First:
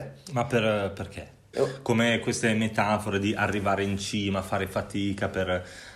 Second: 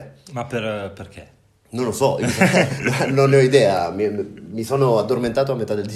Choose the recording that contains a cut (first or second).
first